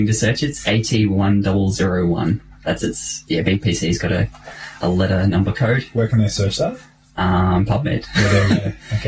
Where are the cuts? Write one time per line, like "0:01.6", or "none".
none